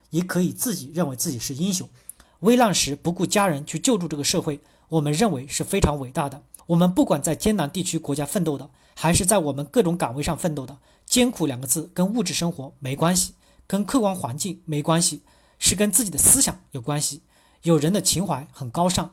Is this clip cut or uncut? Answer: cut